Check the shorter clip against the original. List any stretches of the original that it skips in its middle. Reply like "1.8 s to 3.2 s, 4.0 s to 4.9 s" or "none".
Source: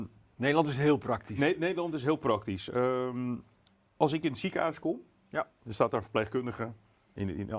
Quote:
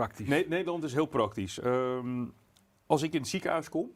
none